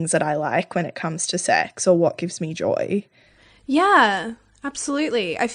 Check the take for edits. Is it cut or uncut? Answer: uncut